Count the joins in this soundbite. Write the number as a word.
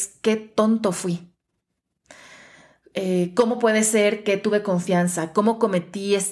zero